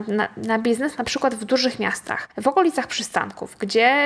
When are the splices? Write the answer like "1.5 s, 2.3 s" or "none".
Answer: 2.3 s